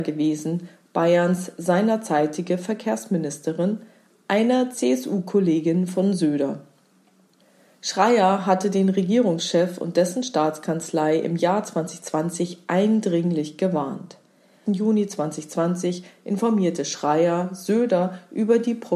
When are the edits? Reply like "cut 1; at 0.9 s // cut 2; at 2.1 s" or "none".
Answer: cut 1; at 14.6 s